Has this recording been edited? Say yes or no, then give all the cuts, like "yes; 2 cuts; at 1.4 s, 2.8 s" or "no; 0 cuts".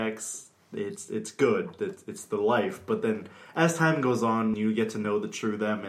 yes; 1 cut; at 4.5 s